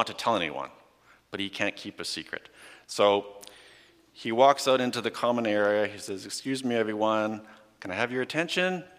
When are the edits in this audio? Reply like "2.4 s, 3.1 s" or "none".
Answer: none

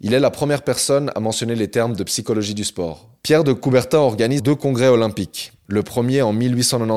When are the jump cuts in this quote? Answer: 3.2 s, 4.4 s

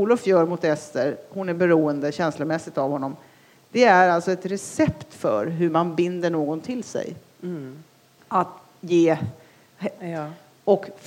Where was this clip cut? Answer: 10.0 s

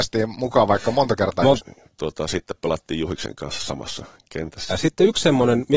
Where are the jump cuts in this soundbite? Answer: 1.6 s, 4.7 s

